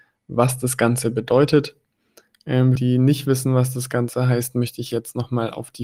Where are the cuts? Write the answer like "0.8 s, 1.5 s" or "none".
2.8 s